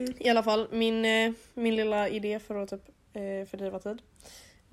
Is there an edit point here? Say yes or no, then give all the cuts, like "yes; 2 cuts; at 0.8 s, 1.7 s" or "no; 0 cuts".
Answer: no; 0 cuts